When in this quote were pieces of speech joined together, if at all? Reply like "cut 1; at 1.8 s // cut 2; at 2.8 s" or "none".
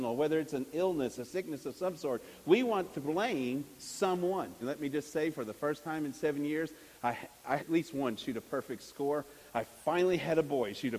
cut 1; at 1.2 s // cut 2; at 4.6 s // cut 3; at 7.6 s